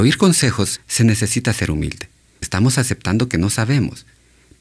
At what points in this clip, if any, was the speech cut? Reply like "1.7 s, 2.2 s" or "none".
2.4 s